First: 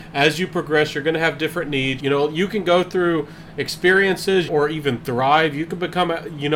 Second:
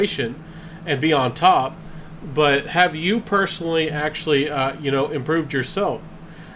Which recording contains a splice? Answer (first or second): first